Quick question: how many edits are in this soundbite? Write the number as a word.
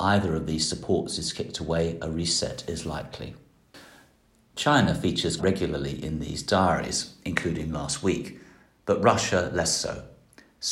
one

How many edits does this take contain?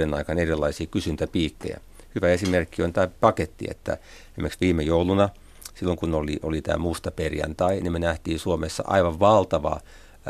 zero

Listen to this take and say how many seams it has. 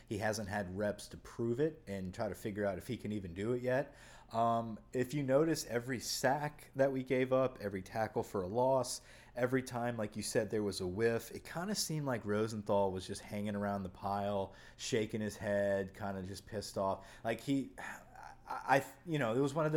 zero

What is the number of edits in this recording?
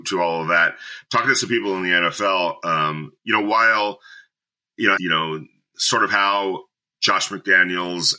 one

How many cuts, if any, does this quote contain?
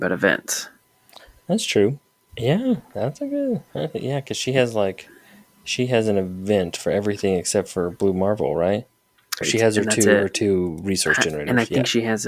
two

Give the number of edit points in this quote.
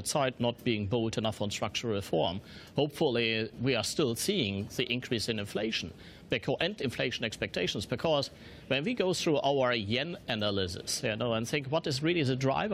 zero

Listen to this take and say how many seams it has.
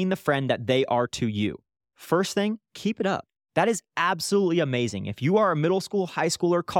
one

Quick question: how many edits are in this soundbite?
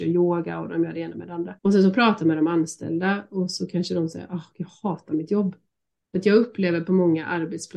two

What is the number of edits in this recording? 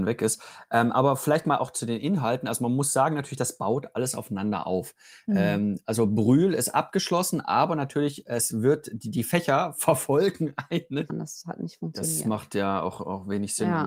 one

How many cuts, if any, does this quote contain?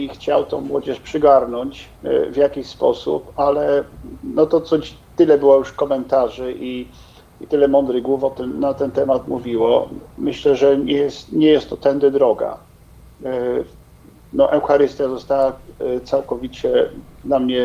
two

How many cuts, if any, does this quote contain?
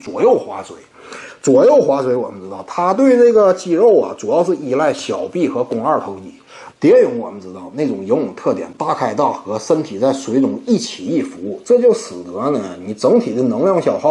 one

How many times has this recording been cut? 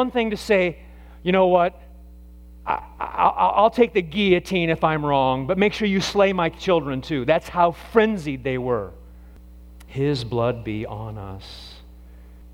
zero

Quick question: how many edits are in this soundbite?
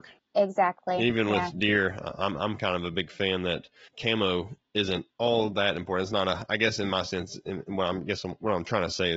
two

